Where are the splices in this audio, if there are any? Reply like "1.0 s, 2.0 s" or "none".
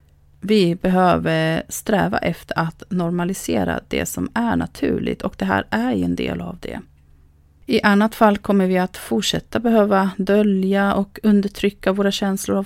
none